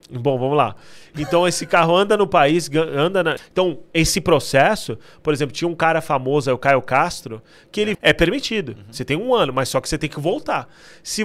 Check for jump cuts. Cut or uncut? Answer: cut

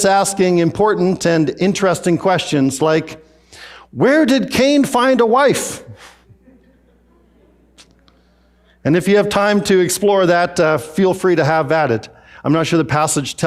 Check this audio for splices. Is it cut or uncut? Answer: uncut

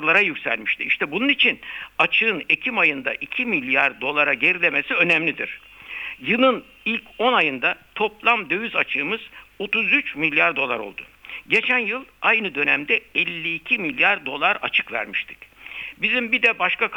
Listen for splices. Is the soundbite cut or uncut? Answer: cut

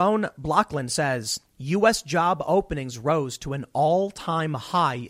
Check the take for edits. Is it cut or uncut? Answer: cut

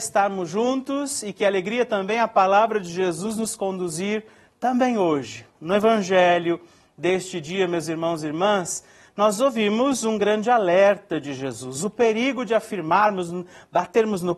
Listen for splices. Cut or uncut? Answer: uncut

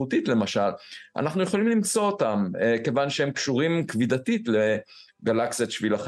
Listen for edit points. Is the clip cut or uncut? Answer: uncut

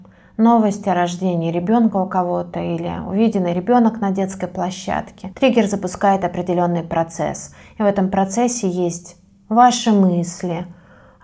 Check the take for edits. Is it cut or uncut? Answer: uncut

